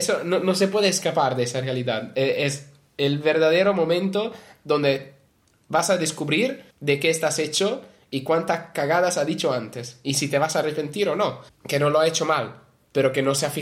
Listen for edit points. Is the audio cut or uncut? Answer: cut